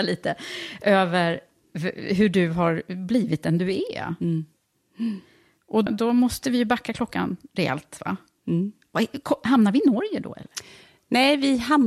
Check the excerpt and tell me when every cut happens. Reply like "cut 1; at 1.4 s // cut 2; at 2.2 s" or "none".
cut 1; at 5.9 s